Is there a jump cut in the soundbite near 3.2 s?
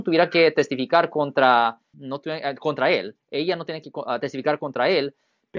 no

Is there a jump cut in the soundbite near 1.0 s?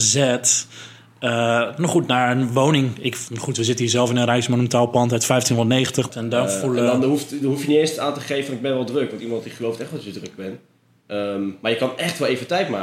no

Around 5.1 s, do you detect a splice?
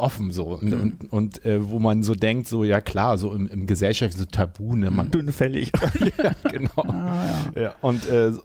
yes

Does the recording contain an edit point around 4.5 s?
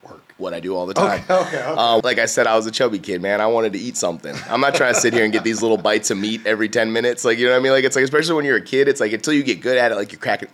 no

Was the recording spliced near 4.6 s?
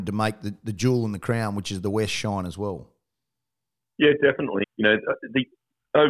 yes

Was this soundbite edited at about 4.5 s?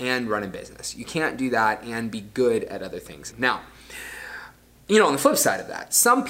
no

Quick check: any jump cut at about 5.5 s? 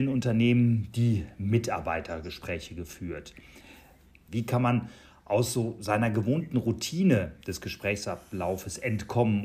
no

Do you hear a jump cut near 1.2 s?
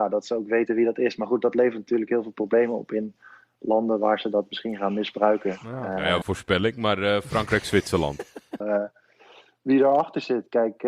no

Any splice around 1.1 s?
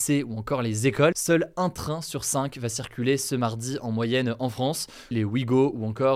yes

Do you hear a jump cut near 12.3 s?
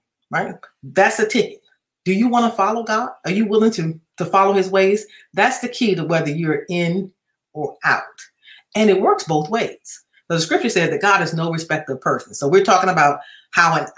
no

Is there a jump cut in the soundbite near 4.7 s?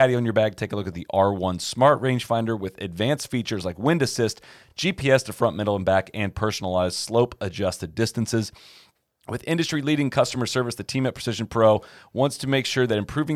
no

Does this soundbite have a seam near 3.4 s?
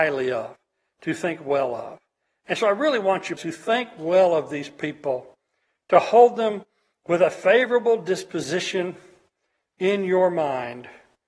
yes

